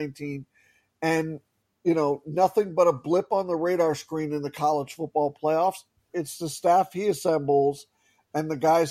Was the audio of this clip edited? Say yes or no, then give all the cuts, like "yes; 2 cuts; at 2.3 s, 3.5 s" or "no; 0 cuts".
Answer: yes; 1 cut; at 6.1 s